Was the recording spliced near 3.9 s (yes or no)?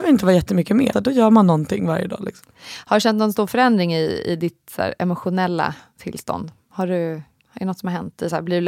no